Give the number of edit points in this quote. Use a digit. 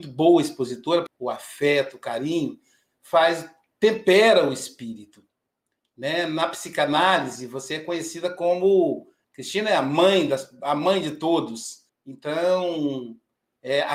3